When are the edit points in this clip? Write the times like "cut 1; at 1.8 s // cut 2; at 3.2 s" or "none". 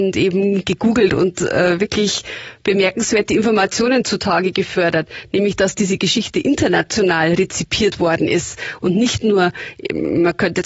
none